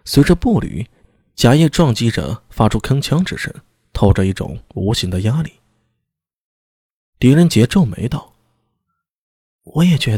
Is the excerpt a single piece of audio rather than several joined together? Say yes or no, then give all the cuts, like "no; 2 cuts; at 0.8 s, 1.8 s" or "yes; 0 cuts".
no; 1 cut; at 7.0 s